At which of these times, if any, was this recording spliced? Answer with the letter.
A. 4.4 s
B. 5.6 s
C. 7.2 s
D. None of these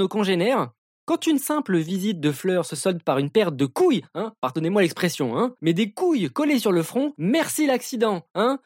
D